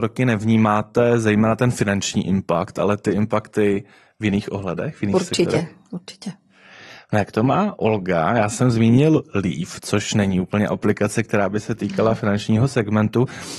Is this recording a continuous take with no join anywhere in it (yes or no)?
yes